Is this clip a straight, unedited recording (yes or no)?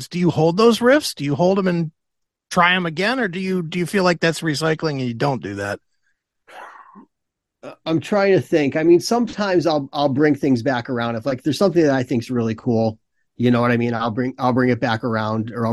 yes